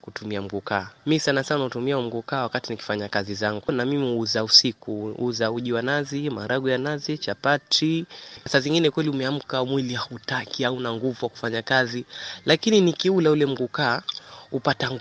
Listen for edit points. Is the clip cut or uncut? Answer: cut